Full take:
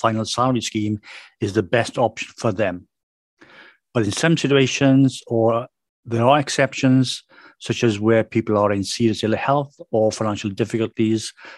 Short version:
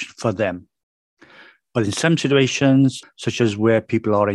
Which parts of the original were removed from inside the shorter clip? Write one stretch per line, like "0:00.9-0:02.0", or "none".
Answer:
0:05.2-0:07.5

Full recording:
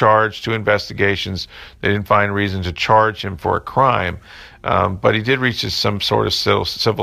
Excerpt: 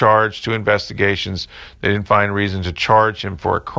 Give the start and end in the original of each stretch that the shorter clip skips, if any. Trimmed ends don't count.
none

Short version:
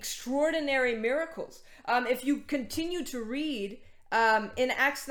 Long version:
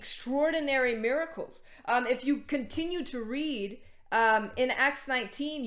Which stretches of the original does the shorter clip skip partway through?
none

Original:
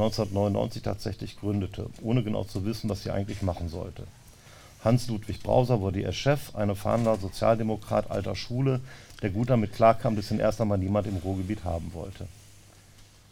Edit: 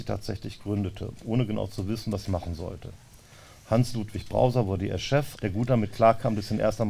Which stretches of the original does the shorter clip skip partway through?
0:03.0-0:03.4
0:06.5-0:09.2

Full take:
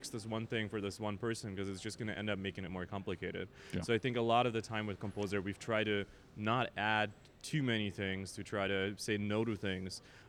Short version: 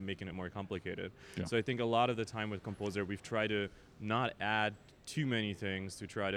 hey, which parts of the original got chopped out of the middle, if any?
none

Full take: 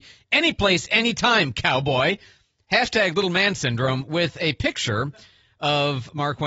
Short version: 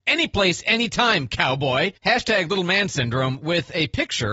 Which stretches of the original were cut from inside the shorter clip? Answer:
0:02.2-0:02.6

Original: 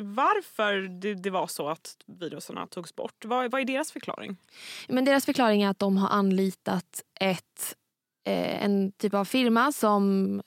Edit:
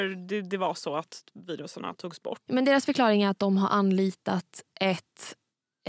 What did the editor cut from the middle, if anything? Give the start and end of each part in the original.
0:03.2-0:04.9

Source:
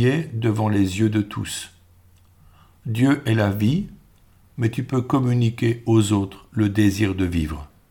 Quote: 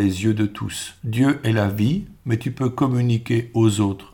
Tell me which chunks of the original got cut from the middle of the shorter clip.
0:01.7-0:02.8
0:04.0-0:04.5

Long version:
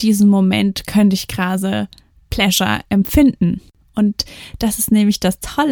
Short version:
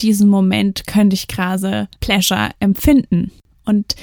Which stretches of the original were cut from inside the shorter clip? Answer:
0:01.9-0:02.2

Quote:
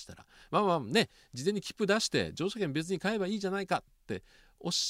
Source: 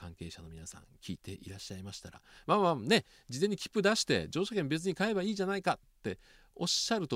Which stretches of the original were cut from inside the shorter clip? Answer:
none

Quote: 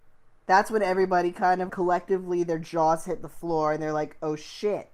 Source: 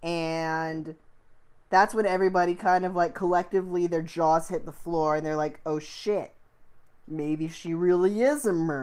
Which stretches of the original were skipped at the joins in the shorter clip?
0:02.9-0:03.1

